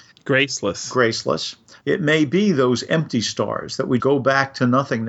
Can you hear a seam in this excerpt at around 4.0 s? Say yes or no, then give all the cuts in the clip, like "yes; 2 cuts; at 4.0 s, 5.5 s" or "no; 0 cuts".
yes; 2 cuts; at 1.8 s, 4.0 s